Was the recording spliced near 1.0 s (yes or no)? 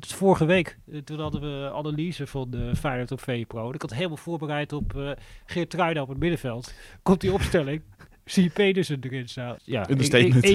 no